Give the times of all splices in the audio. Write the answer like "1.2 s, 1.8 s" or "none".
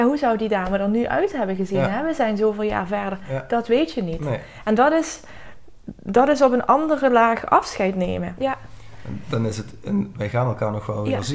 8.4 s